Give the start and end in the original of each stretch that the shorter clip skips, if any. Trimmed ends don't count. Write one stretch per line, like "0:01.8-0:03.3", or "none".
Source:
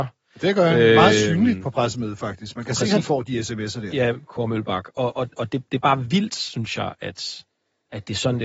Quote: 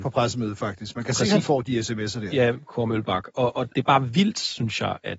0:05.3-0:05.7